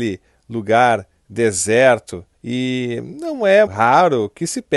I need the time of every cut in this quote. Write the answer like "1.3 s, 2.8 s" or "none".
2.3 s, 3.7 s